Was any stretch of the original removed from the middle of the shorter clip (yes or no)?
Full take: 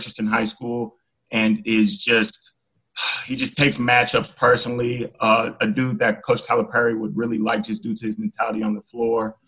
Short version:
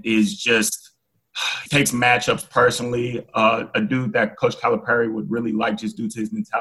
yes